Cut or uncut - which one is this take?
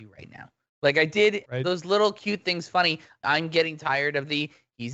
cut